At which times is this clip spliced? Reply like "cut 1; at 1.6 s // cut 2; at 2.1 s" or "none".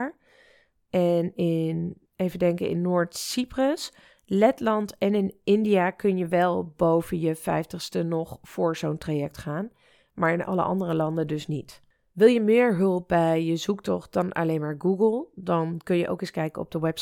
cut 1; at 2.1 s